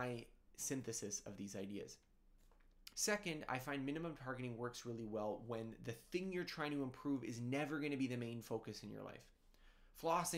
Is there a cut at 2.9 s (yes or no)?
yes